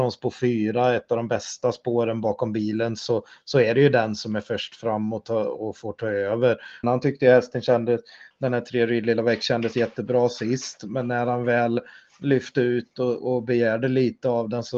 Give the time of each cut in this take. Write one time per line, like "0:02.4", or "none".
0:06.8